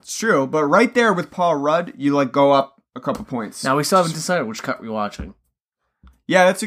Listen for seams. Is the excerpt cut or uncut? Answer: uncut